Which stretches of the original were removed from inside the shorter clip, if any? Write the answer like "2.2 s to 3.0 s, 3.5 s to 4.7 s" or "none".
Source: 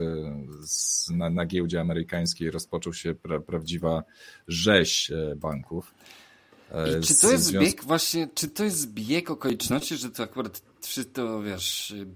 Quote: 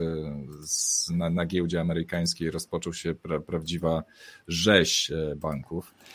none